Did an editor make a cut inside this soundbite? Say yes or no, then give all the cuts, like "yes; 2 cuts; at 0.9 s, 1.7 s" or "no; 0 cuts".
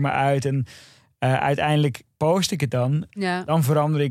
yes; 1 cut; at 3.1 s